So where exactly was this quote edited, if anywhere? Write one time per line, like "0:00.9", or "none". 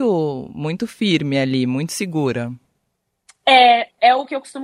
none